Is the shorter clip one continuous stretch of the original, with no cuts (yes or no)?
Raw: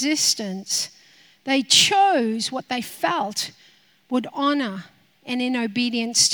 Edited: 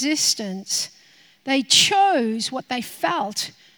yes